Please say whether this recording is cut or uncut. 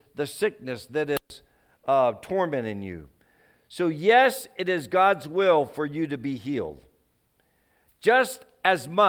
uncut